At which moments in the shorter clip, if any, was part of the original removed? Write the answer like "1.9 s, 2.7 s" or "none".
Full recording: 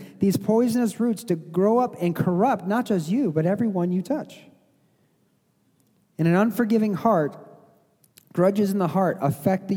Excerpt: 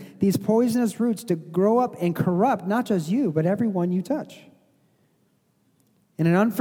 none